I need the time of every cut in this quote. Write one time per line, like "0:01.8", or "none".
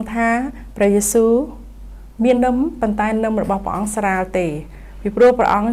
0:02.4

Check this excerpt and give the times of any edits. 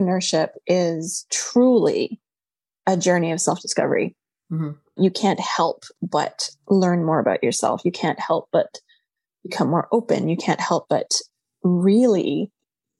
none

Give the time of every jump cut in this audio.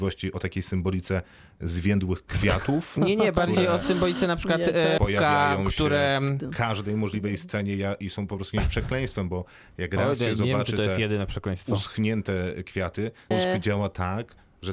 0:05.0
0:13.3

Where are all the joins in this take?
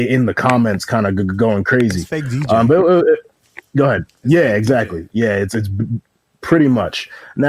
none

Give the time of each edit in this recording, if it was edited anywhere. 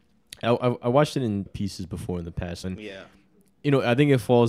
0:01.5
0:02.6

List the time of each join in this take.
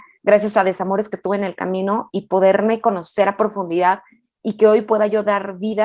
0:02.1

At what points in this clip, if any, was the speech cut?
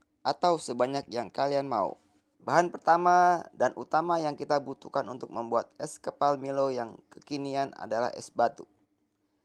0:02.3

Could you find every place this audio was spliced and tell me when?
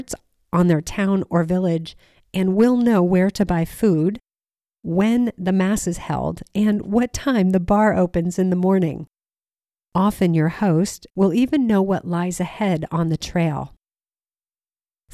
0:11.1

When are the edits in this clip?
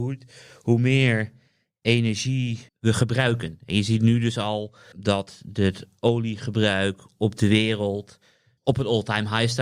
0:02.7
0:04.9
0:08.6

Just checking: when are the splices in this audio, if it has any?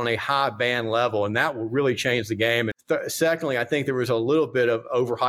0:02.7

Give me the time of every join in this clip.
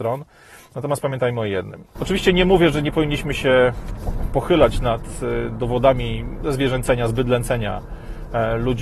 0:01.9

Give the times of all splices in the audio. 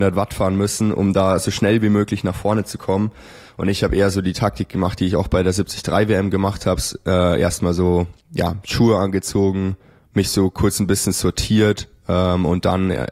none

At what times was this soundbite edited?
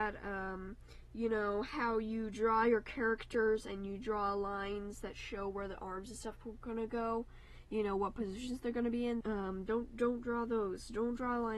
0:09.2

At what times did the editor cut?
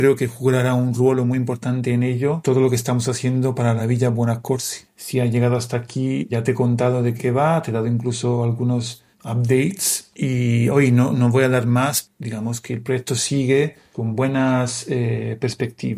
none

